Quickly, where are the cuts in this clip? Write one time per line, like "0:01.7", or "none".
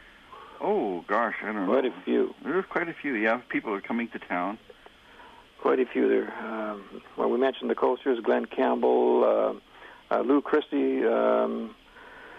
none